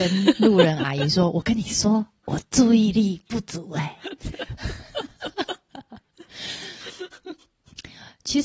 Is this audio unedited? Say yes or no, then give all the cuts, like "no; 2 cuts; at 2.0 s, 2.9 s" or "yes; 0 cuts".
yes; 0 cuts